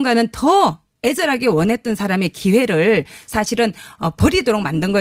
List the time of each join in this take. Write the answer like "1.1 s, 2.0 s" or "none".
none